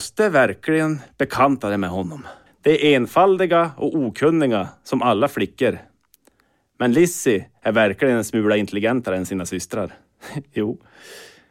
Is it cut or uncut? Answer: cut